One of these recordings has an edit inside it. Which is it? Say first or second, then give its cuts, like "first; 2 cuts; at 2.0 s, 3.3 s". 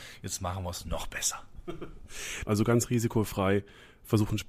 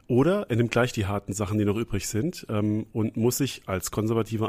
first; 1 cut; at 2.5 s